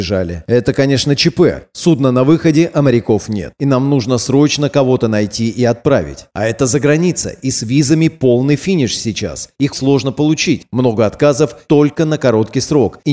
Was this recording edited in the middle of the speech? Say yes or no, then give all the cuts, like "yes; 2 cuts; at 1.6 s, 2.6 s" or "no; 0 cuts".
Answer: yes; 2 cuts; at 9.7 s, 11.7 s